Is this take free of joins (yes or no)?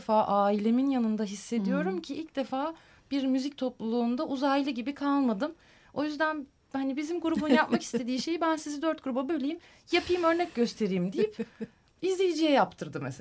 yes